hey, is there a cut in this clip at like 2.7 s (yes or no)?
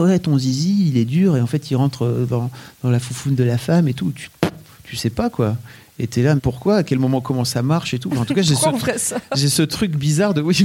no